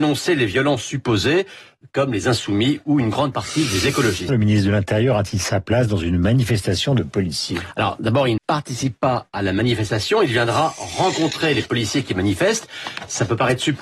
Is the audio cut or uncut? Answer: cut